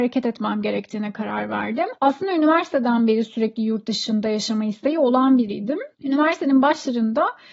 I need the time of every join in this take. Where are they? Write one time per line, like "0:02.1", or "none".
0:02.0
0:05.9